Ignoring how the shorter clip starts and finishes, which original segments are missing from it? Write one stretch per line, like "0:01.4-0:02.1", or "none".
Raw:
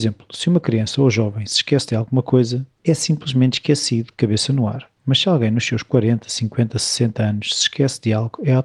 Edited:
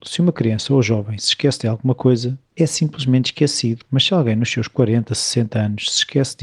0:04.1-0:05.0
0:06.2-0:06.7